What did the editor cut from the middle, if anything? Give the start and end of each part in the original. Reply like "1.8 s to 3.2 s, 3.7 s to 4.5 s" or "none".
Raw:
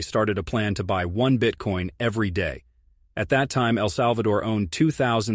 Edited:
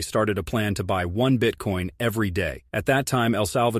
2.7 s to 3.1 s